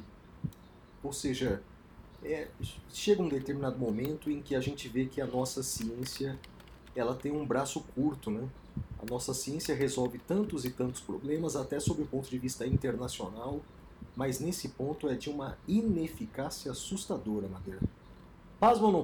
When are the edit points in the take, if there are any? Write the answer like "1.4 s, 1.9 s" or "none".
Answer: none